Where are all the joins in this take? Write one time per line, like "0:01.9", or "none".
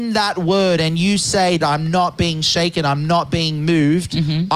0:01.6